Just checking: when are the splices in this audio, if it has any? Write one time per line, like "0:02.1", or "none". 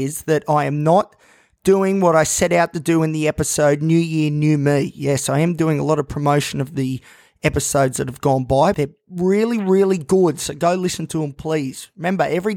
0:08.7